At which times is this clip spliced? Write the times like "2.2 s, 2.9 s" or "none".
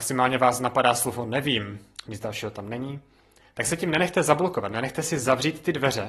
2.1 s